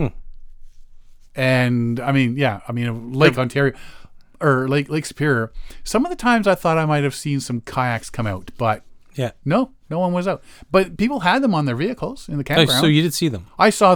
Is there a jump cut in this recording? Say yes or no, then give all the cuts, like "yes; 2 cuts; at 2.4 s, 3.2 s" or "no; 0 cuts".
no; 0 cuts